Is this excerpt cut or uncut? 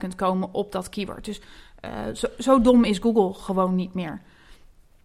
uncut